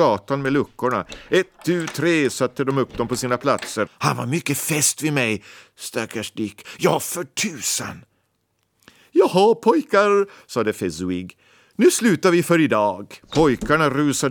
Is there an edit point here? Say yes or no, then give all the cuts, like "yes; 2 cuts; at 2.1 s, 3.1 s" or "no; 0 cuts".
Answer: yes; 2 cuts; at 3.9 s, 13.2 s